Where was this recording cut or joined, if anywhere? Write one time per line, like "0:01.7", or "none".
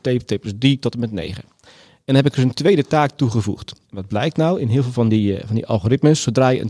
none